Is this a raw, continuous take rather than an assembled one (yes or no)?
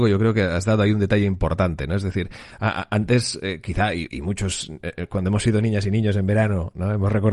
yes